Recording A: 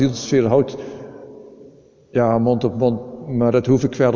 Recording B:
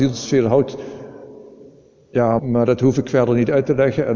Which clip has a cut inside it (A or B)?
B